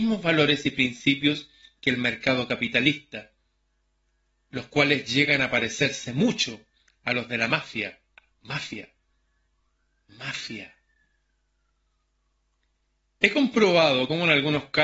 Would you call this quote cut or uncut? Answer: uncut